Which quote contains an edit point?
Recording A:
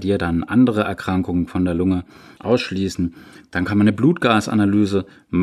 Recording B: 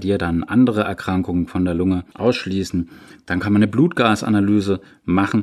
B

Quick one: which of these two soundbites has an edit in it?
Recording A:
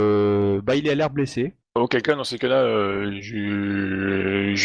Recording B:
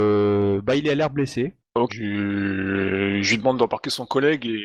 B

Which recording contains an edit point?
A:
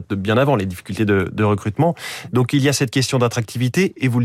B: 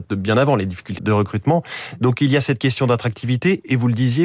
B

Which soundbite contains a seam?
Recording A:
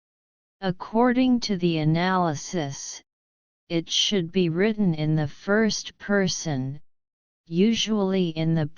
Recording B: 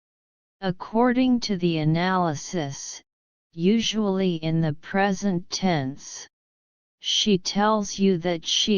B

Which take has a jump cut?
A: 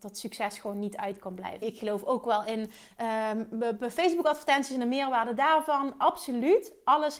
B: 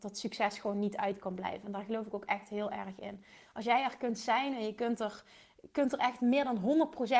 A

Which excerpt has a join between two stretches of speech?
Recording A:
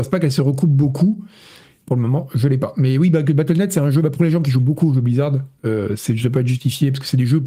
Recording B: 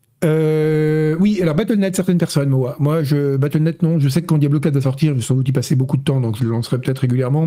A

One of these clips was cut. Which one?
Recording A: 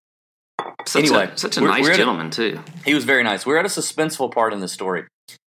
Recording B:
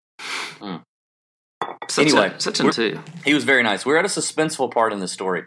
B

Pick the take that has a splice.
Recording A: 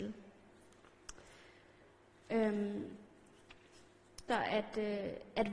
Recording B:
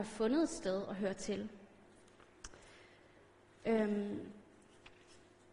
A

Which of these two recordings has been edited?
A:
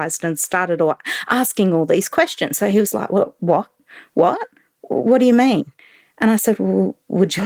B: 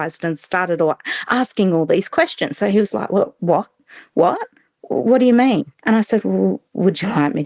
B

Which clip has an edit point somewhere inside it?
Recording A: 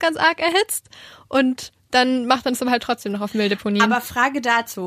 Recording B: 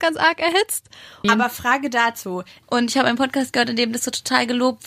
B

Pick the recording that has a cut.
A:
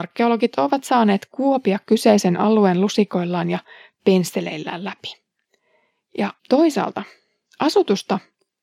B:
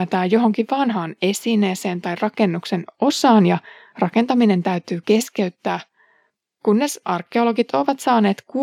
A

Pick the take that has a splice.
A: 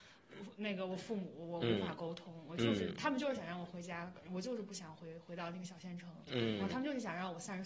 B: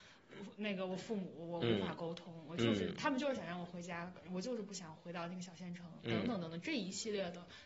B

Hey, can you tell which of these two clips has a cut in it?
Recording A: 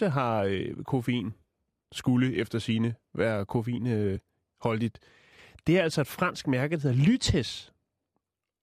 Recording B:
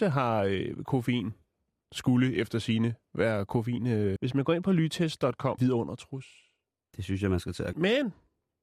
B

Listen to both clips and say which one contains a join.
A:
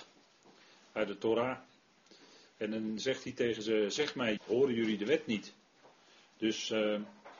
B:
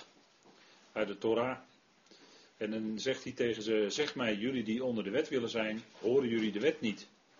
A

